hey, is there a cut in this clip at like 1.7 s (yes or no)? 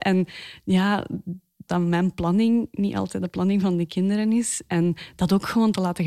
yes